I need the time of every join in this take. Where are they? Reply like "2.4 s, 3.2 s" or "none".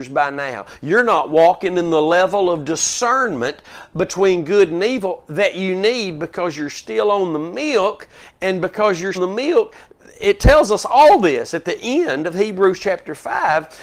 9.1 s